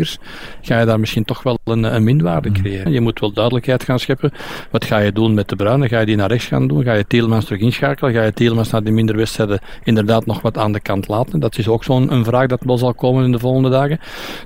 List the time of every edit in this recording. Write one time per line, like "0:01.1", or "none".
0:02.9